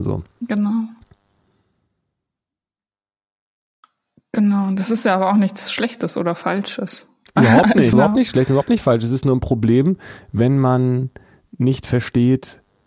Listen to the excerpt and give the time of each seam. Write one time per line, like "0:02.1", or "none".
0:07.9

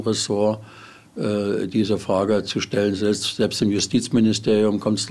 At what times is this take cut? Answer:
none

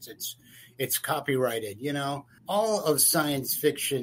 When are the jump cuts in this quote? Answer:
0:02.4

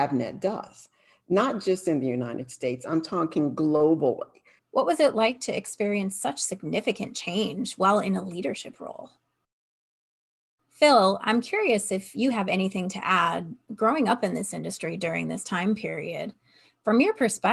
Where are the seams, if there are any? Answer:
0:04.6
0:10.6

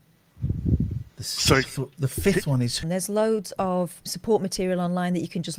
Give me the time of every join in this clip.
0:01.1
0:02.8
0:04.1

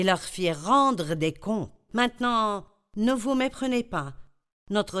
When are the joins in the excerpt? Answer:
0:01.9

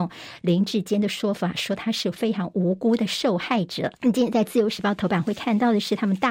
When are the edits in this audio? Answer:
0:04.0

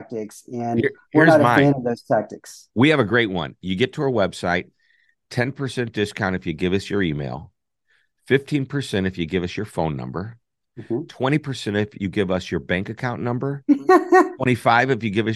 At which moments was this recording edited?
none

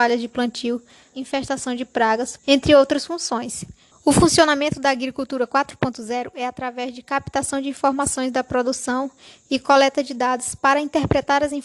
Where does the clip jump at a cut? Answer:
0:01.1
0:02.4
0:03.9

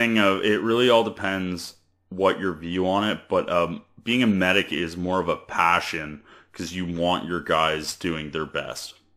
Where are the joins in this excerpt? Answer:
none

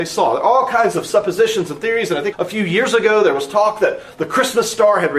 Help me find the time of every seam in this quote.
0:02.3

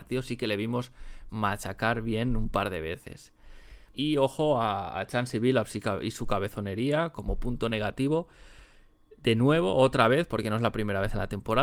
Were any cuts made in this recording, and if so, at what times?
0:03.9

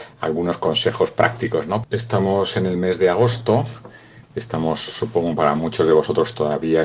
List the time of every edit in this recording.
0:01.8

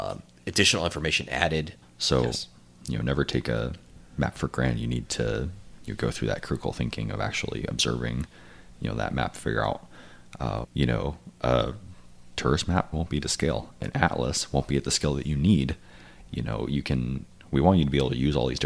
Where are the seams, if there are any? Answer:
0:01.8
0:10.6
0:12.9

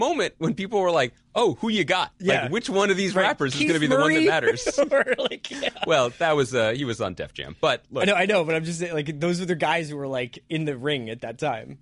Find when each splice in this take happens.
none

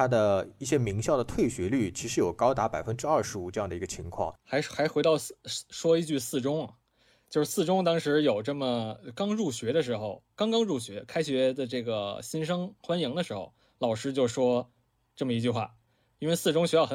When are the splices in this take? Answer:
0:04.4

